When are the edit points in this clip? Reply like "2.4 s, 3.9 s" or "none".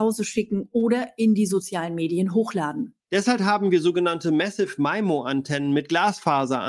3.0 s